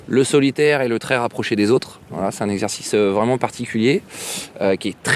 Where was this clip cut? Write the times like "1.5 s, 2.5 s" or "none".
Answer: none